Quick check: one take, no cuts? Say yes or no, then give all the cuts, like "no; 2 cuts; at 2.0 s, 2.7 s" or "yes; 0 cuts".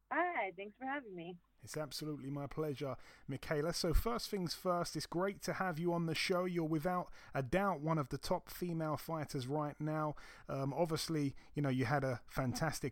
yes; 0 cuts